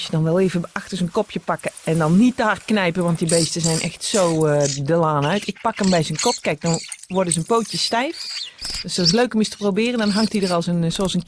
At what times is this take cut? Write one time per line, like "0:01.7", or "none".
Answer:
none